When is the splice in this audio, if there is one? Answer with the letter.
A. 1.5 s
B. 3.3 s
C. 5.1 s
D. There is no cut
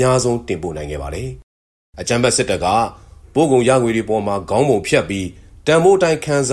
D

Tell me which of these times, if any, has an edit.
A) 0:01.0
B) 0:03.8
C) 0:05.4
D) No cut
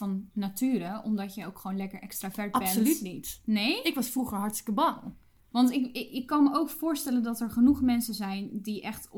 D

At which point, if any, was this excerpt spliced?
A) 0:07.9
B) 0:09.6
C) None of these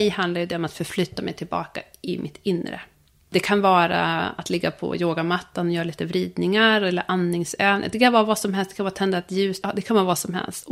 B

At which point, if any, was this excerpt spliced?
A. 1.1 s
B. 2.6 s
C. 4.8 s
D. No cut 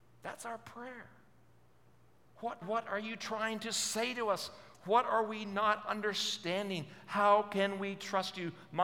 B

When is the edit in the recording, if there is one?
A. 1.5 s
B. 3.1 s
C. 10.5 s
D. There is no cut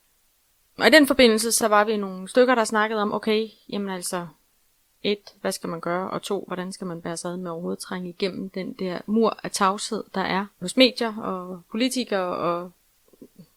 C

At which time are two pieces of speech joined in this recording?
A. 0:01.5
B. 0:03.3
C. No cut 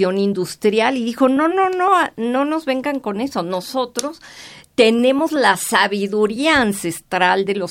A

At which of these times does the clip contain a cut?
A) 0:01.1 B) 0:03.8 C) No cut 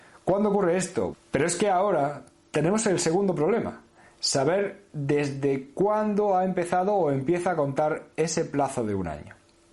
A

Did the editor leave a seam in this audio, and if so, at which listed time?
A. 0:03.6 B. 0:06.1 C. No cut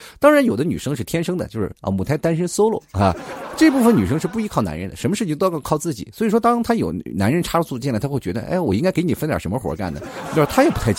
C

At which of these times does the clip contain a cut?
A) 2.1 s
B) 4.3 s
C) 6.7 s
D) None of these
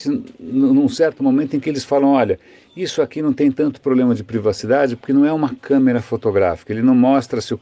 D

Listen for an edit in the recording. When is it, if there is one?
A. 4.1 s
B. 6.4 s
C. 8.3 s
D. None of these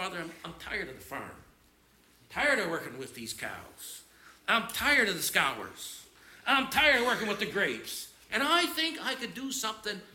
C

